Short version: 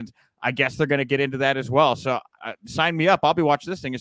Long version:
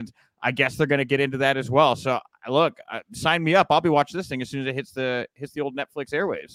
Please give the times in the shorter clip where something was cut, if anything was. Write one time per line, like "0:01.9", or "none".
0:02.4

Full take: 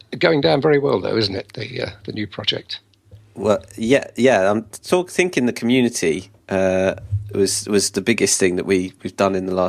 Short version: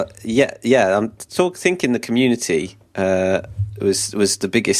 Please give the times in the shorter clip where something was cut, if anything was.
none

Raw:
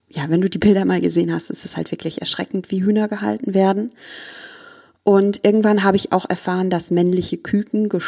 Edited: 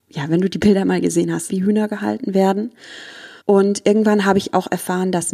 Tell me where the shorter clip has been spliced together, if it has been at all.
0:01.5
0:03.4

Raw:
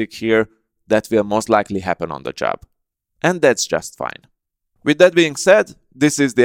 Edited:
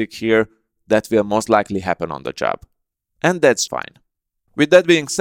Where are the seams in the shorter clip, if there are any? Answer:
0:03.7

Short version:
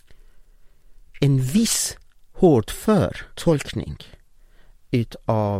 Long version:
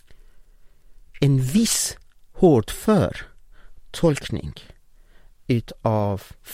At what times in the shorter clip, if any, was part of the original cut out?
0:03.3

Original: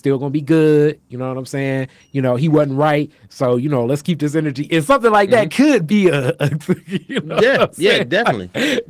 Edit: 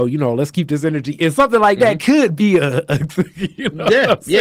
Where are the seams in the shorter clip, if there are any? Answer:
none

